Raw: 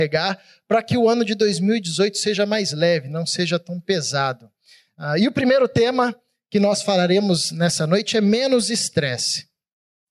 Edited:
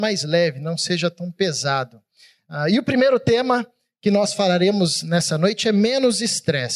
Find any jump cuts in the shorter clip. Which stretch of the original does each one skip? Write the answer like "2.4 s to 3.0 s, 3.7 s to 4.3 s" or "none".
none